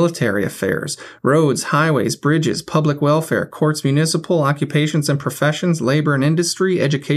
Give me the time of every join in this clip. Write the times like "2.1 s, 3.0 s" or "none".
none